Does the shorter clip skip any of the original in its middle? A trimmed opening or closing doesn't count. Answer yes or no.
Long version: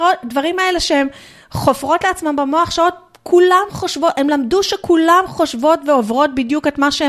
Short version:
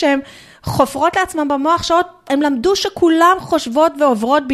yes